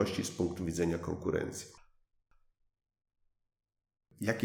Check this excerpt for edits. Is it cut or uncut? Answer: uncut